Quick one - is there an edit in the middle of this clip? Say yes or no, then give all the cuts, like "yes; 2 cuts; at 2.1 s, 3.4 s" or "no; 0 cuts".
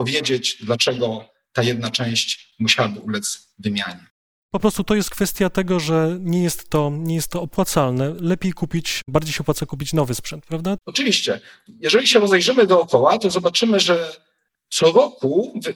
yes; 1 cut; at 10.8 s